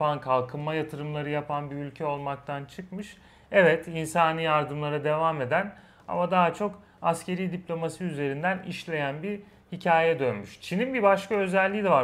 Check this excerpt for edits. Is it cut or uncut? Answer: uncut